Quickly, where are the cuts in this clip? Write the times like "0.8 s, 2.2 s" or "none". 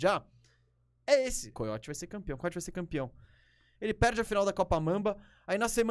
1.5 s, 3.7 s